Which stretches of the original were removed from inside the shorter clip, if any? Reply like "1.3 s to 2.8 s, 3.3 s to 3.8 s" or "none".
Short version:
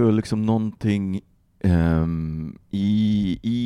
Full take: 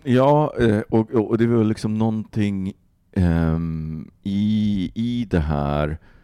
none